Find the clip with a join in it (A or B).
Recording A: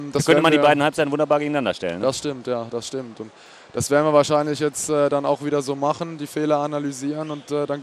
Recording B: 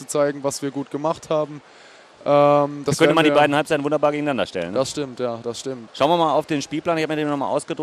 B